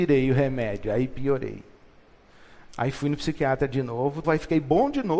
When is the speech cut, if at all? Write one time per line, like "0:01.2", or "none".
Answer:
0:04.2